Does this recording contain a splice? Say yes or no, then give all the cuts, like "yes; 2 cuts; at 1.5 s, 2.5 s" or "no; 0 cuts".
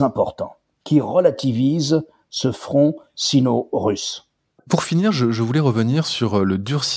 no; 0 cuts